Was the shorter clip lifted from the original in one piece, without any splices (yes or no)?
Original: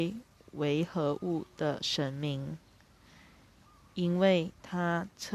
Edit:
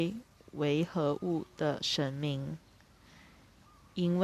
yes